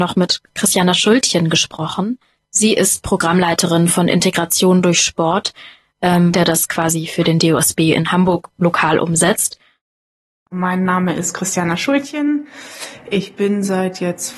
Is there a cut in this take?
yes; 1 cut; at 6.3 s

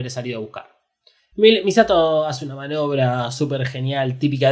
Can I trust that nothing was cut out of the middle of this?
no; 1 cut; at 1.3 s

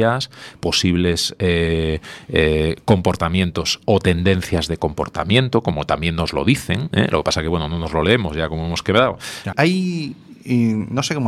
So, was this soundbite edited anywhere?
yes; 1 cut; at 9.5 s

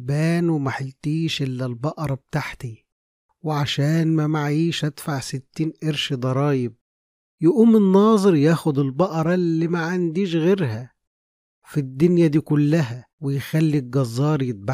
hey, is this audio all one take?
no; 1 cut; at 13.1 s

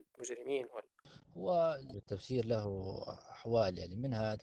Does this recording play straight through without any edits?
no; 1 cut; at 1.9 s

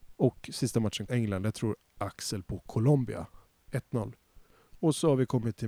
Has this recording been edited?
yes; 1 cut; at 1.1 s

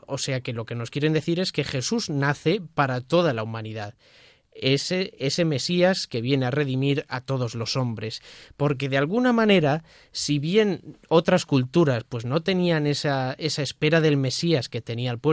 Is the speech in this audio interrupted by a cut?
no; 0 cuts

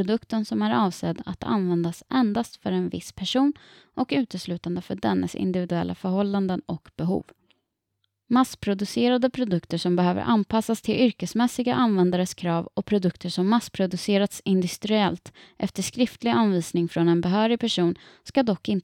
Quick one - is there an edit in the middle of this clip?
no; 0 cuts

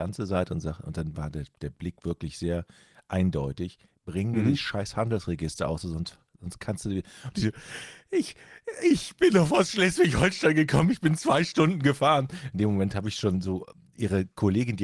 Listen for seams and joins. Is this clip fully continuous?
yes; 0 cuts

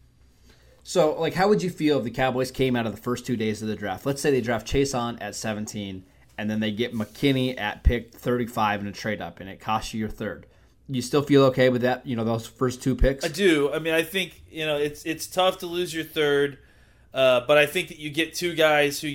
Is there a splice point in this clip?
no; 0 cuts

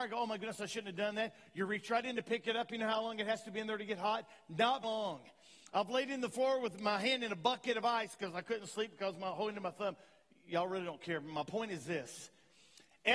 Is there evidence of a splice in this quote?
yes; 1 cut; at 4.8 s

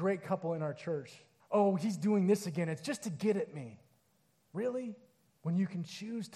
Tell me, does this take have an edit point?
yes; 2 cuts; at 1.4 s, 5.3 s

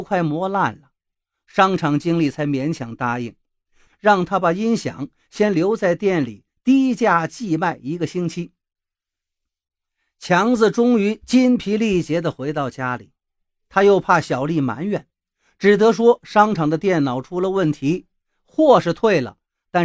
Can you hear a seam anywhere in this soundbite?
yes; 1 cut; at 3.9 s

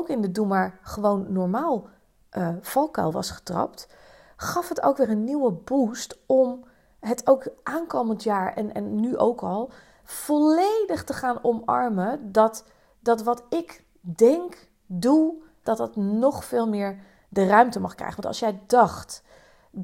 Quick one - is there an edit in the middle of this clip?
yes; 1 cut; at 15.6 s

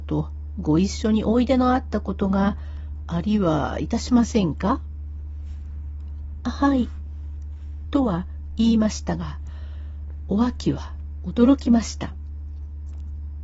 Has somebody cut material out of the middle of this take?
no; 0 cuts

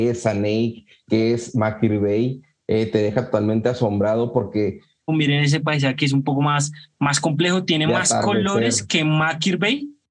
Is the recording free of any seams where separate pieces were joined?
no; 1 cut; at 5.1 s

